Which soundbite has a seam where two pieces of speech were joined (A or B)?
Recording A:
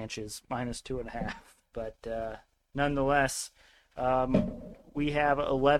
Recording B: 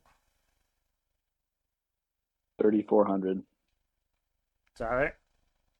A